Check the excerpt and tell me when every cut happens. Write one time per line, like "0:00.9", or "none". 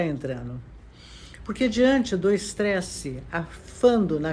0:01.4